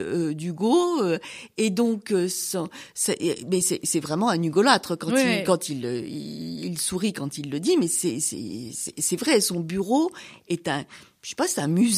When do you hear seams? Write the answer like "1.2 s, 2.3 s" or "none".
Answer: none